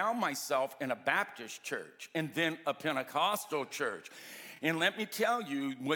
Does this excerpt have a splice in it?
no; 0 cuts

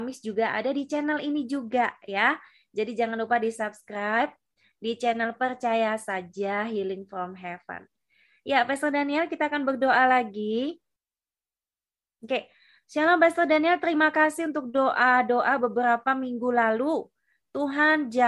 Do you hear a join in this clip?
no; 0 cuts

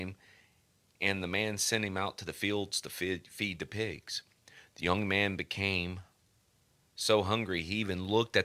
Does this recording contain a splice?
no; 0 cuts

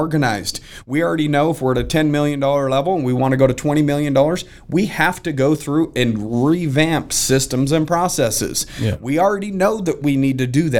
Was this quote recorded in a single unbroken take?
yes; 0 cuts

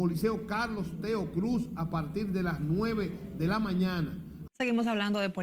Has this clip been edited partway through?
yes; 1 cut; at 4.5 s

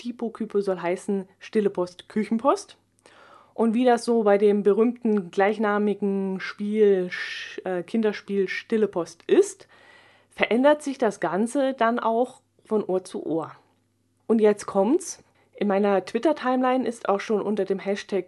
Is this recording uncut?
no; 2 cuts; at 14.2 s, 15.3 s

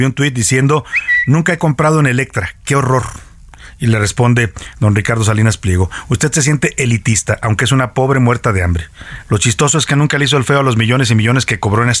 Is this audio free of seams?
yes; 0 cuts

